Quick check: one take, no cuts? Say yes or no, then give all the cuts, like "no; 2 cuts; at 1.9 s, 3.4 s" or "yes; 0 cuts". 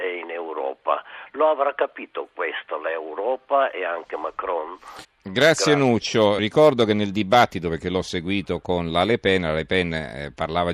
no; 2 cuts; at 5.0 s, 6.4 s